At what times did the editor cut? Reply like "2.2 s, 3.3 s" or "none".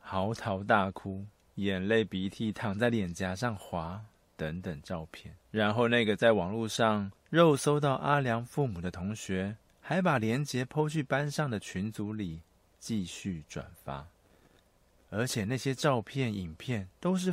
5.4 s, 12.7 s, 14.9 s